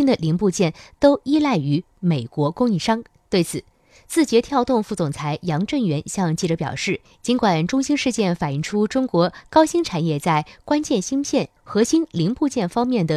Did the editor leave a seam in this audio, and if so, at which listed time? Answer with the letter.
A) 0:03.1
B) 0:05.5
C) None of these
C